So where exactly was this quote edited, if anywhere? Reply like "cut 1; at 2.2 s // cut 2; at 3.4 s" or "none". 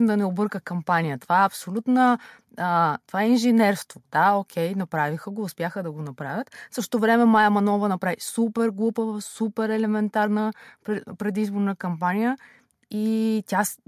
cut 1; at 1.2 s